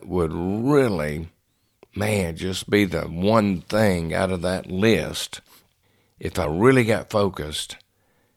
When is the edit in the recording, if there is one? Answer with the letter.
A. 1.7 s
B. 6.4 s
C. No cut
C